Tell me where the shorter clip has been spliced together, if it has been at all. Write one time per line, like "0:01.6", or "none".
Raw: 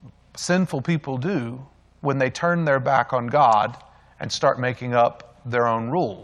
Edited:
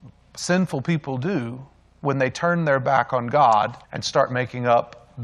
0:03.8